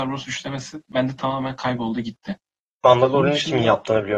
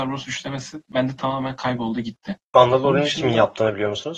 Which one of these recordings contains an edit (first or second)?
second